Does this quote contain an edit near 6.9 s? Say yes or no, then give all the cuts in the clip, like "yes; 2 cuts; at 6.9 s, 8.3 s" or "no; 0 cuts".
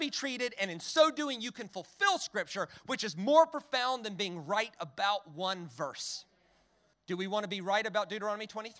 yes; 1 cut; at 6.9 s